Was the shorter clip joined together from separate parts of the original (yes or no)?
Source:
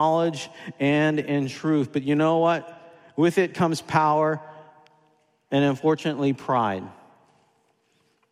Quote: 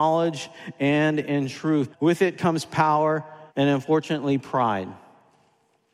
yes